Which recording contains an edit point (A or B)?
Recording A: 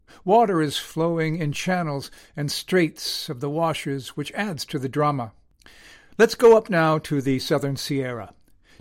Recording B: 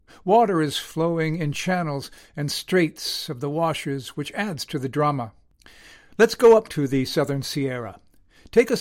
B